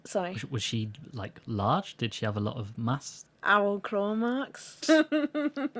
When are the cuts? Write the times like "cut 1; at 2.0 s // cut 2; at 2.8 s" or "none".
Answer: cut 1; at 3.3 s // cut 2; at 4.8 s